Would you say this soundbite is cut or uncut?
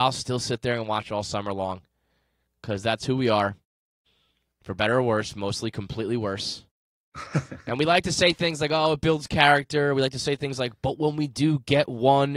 uncut